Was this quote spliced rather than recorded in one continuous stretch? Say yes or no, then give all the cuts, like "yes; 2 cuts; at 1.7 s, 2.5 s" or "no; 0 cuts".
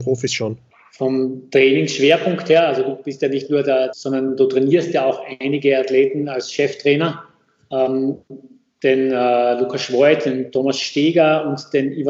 yes; 1 cut; at 3.9 s